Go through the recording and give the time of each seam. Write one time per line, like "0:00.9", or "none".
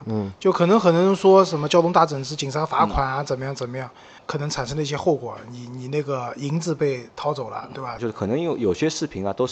0:04.2
0:08.0